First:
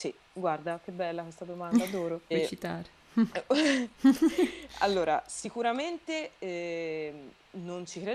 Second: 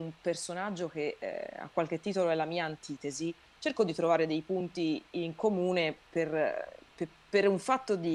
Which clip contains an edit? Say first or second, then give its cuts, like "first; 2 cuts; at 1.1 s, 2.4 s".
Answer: first; 1 cut; at 2.3 s